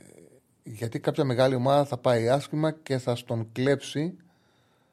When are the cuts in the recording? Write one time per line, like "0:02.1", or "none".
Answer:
none